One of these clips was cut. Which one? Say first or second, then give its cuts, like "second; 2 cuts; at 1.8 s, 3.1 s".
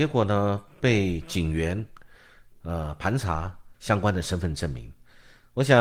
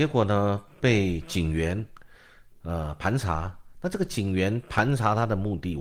first; 1 cut; at 3.7 s